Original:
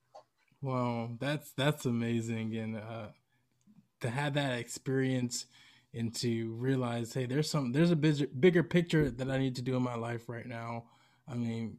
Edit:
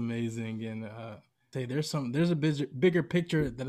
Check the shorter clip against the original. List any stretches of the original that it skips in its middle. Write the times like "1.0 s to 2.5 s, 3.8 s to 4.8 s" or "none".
3.4 s to 7.1 s